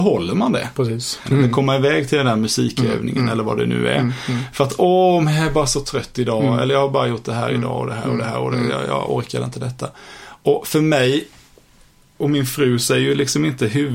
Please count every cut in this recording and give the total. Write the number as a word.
one